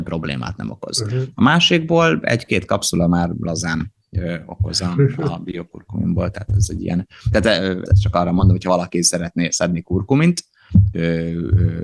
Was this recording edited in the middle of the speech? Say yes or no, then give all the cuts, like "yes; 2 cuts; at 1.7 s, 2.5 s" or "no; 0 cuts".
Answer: yes; 2 cuts; at 7.9 s, 10.9 s